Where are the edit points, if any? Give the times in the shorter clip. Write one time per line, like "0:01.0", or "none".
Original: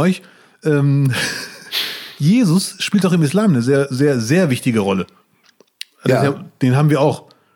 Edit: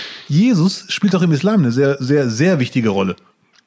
none